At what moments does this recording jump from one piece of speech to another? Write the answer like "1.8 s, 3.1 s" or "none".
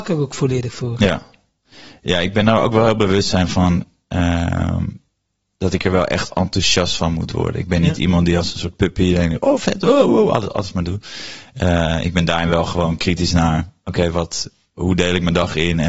10.1 s

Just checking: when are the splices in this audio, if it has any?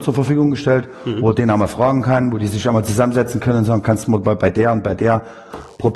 none

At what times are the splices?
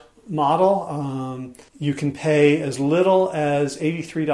1.7 s

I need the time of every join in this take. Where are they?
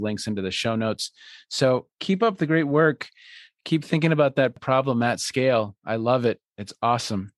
none

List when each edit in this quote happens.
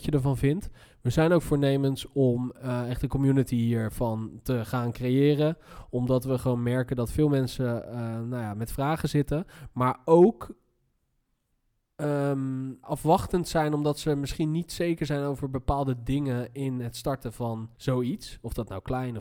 12.8 s, 17.7 s

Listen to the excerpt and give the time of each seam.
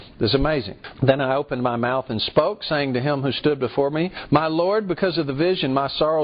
0.9 s

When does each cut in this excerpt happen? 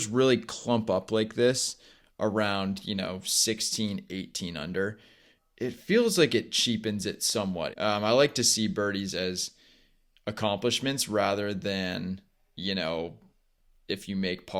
7.7 s

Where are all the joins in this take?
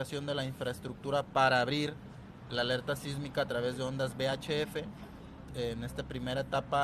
2.5 s, 5.5 s

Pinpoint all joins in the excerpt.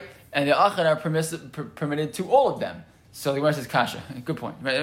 3.0 s

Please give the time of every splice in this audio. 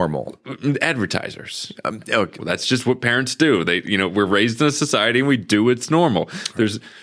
2.4 s

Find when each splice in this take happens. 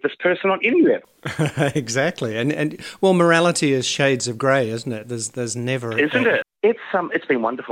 6.4 s

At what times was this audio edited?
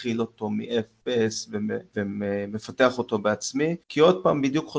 3.8 s

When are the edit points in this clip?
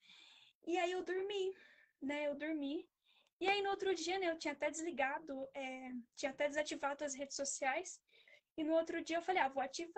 none

